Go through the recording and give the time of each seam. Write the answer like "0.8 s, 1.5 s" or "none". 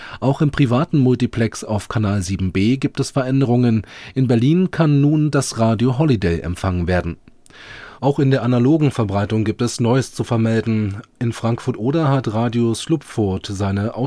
8.0 s